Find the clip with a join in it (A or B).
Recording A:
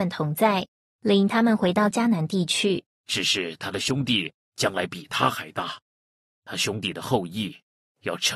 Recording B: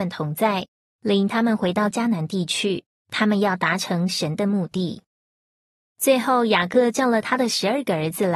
A